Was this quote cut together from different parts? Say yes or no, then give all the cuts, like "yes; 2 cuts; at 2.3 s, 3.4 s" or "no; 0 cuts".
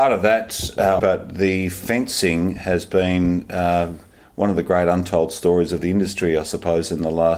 yes; 1 cut; at 1.0 s